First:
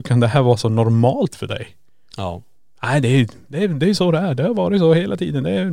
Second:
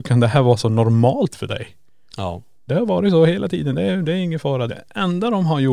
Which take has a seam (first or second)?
second